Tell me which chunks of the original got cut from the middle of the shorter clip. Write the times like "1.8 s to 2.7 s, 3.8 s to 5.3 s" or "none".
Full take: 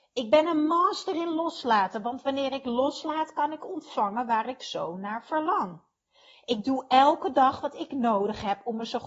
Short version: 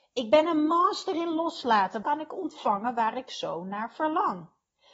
2.0 s to 3.3 s